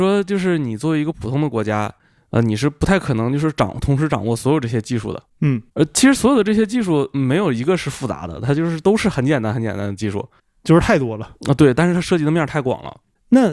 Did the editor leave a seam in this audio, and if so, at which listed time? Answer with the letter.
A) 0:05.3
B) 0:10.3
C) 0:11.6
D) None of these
D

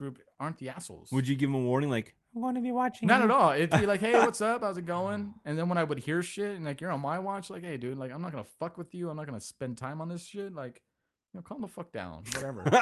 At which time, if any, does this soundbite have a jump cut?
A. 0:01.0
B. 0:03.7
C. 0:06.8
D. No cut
B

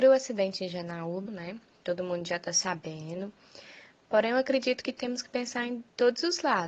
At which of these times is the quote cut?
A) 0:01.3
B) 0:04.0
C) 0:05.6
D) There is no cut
A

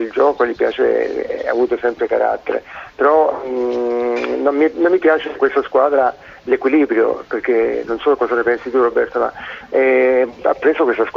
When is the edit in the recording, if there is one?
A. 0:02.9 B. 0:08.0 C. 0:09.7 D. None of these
D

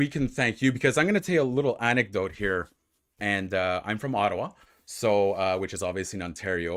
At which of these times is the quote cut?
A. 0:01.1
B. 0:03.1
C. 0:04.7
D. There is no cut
B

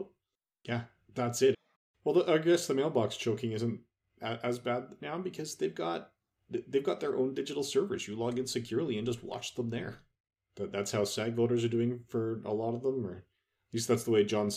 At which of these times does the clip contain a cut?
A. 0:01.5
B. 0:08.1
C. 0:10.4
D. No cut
A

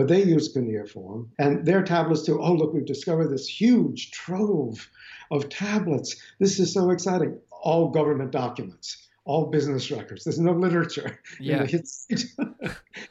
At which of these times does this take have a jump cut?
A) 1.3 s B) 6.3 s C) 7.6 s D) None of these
A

